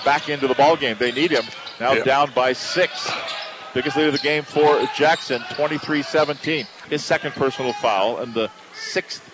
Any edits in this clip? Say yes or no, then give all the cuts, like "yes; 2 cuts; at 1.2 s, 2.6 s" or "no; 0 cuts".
yes; 1 cut; at 6.8 s